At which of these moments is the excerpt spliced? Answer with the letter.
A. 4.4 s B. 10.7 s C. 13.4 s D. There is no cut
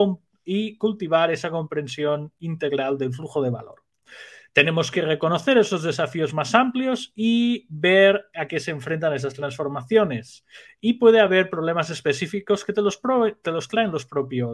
D